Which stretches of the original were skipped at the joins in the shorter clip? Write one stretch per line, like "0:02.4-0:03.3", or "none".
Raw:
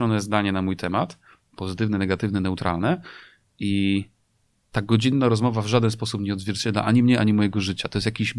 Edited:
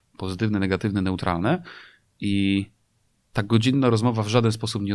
none

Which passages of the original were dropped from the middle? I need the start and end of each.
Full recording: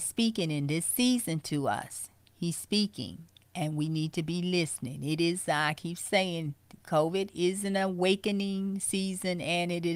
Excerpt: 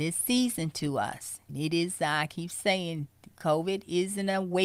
0:02.2-0:05.0

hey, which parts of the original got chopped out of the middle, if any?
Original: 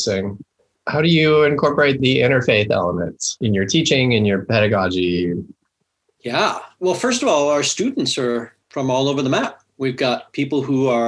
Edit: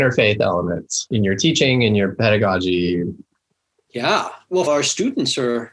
0:07.0-0:07.5

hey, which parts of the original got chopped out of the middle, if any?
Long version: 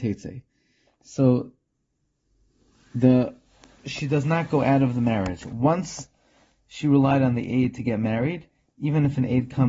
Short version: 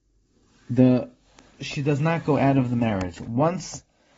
none

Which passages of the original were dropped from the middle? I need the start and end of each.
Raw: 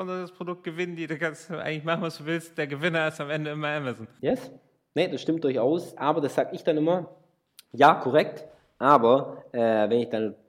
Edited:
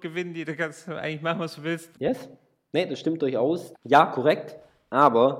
0:02.5-0:04.1
0:05.9-0:07.6

